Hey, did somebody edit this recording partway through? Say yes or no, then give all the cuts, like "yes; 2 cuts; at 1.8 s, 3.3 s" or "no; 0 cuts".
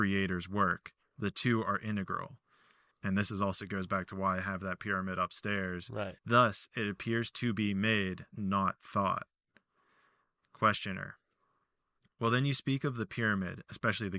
yes; 2 cuts; at 2.9 s, 6.2 s